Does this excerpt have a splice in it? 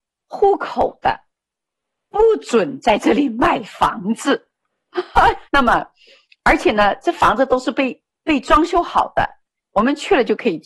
yes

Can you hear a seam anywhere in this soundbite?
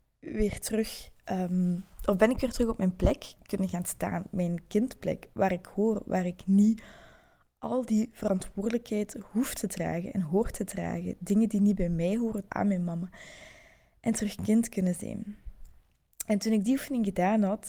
yes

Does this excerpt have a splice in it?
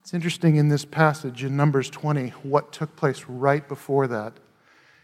no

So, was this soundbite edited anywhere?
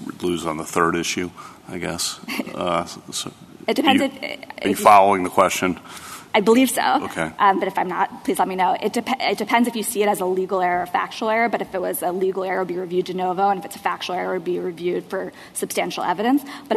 no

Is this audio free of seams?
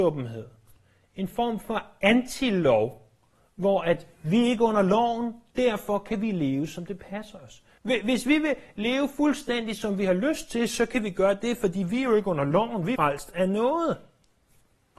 no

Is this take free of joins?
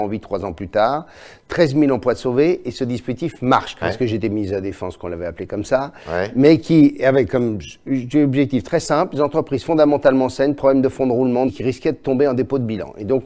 no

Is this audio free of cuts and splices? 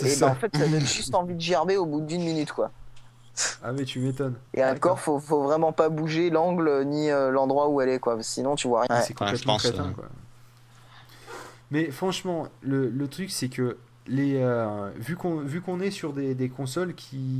no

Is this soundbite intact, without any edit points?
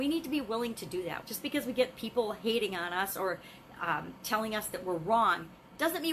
no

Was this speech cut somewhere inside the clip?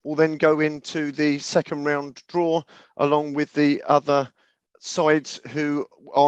no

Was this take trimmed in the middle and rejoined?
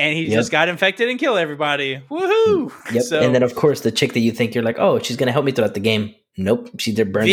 no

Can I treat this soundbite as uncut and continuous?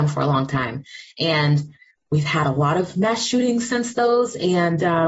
yes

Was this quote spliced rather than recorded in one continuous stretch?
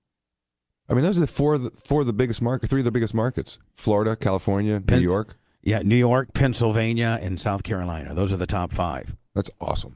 no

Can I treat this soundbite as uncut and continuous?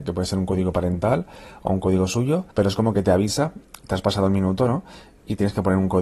no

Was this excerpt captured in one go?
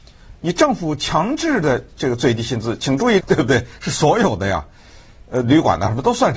no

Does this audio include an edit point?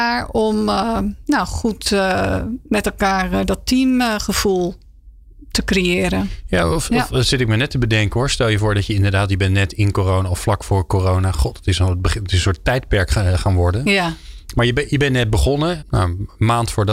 yes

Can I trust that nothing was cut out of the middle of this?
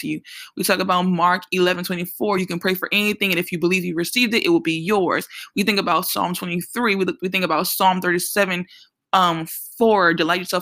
yes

